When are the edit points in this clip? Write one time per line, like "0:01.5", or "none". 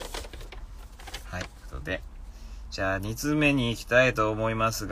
0:01.6